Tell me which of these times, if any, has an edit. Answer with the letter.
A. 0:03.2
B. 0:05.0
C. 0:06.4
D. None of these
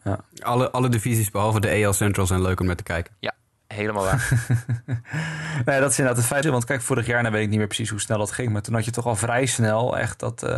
C